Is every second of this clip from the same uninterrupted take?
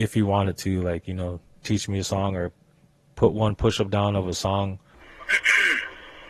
no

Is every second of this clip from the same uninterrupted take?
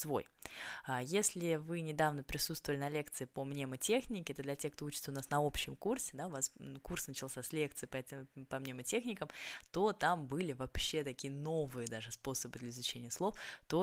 yes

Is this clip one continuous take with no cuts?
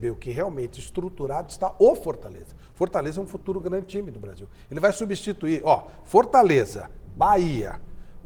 yes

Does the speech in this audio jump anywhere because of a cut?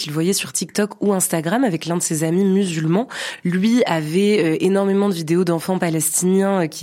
no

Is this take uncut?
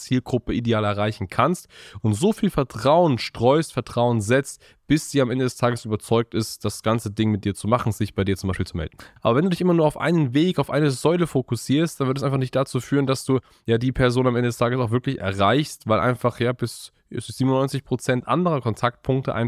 no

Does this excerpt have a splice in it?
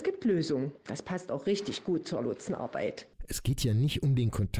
no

